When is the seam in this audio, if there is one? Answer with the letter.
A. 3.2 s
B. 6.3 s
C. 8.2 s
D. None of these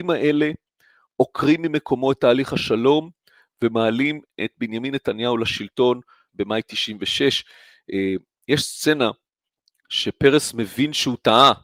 B